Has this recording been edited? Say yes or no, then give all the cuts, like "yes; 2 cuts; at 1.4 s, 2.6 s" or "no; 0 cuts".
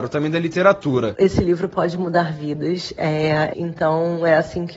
yes; 1 cut; at 3.5 s